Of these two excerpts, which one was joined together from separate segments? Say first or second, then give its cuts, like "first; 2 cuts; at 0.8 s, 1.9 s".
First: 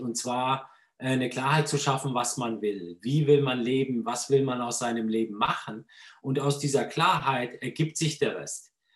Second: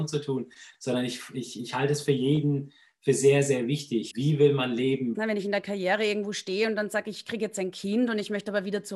second; 2 cuts; at 4.1 s, 5.1 s